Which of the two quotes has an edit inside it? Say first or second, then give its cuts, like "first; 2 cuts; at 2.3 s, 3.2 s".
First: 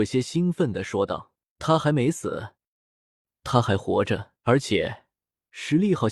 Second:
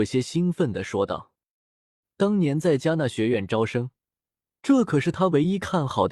first; 2 cuts; at 1.6 s, 4.4 s